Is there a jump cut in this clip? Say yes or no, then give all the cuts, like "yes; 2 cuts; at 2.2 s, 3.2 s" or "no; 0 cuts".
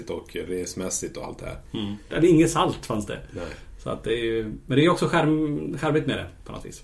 yes; 1 cut; at 2.1 s